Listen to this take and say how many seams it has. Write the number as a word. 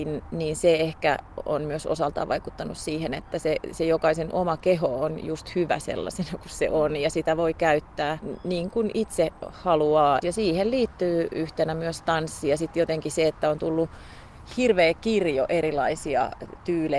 zero